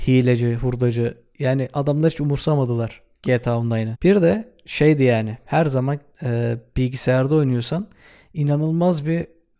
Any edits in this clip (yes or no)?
yes